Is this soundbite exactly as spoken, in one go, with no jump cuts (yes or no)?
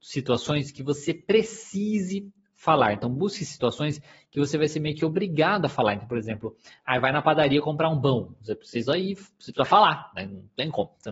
yes